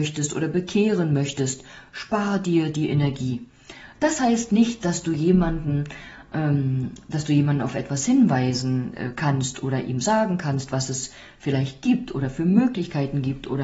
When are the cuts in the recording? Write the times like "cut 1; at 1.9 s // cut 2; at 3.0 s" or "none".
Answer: cut 1; at 3.9 s